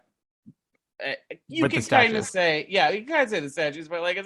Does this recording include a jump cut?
no; 0 cuts

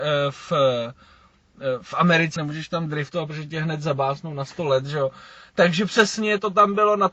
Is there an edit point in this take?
yes; 1 cut; at 2.4 s

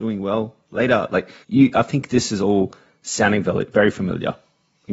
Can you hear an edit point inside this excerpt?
yes; 1 cut; at 1.4 s

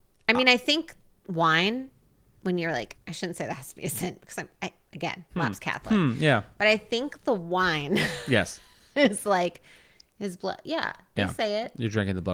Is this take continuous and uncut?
no; 1 cut; at 3.0 s

